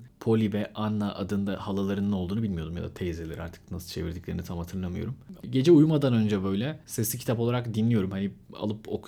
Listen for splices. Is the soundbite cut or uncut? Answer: cut